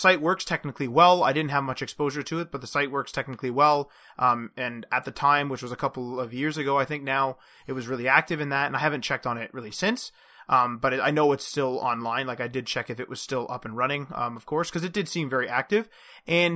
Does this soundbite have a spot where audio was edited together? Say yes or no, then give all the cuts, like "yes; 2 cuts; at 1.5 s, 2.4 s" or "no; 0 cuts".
no; 0 cuts